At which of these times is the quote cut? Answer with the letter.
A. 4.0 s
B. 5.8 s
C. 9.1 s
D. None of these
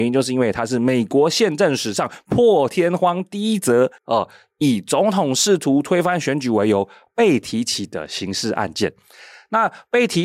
A